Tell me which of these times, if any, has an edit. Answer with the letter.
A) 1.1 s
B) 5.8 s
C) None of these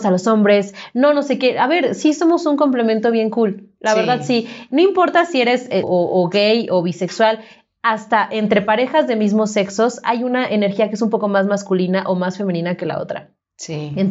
B